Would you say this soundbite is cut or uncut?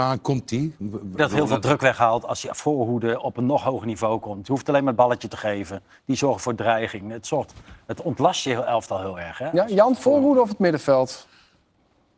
cut